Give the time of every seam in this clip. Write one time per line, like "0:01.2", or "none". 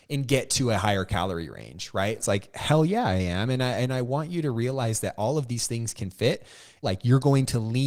0:02.2
0:06.8

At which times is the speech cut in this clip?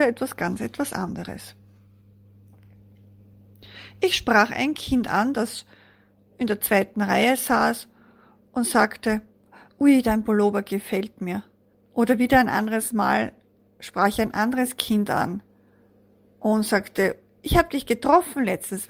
0:11.7

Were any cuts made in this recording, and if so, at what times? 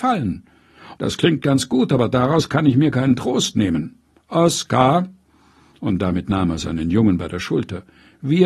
0:00.9

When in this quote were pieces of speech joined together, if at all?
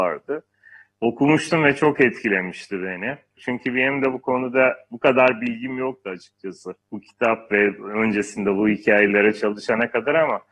0:03.4
0:06.8

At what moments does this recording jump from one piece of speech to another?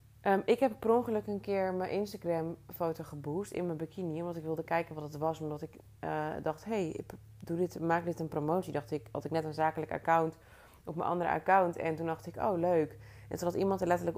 none

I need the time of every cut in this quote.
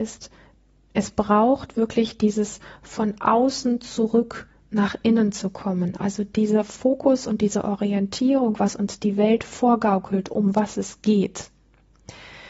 none

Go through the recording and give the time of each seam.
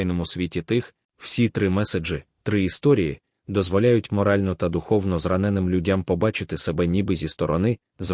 0:01.0
0:03.3

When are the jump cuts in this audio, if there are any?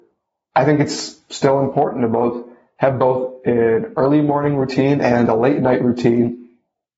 none

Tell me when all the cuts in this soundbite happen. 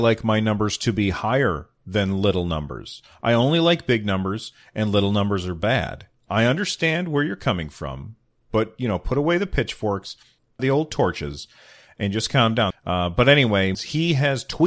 0:10.6
0:12.7
0:13.7

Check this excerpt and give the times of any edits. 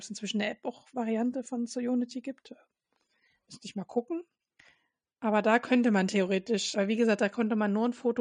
0:06.7

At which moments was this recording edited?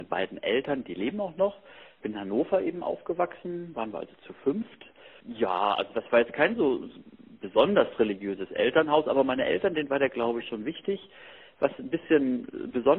none

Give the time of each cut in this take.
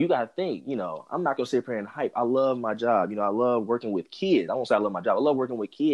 none

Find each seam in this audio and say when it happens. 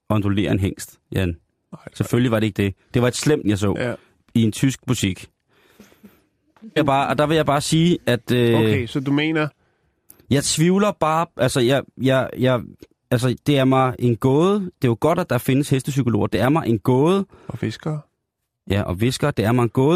0:03.4
0:06.8

